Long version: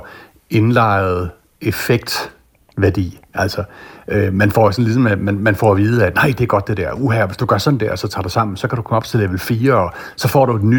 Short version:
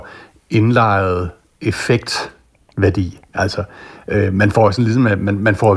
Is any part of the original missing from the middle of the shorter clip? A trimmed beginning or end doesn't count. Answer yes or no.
no